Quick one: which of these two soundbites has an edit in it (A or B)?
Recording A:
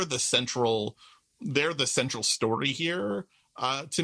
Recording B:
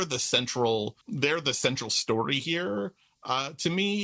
B